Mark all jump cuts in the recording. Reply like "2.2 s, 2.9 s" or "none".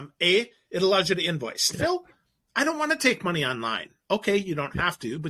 1.7 s